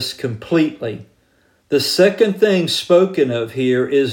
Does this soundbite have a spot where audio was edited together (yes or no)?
no